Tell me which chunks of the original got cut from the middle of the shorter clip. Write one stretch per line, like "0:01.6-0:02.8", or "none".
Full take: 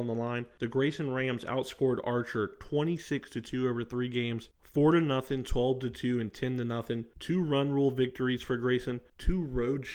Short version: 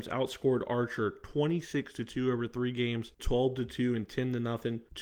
0:04.6-0:05.4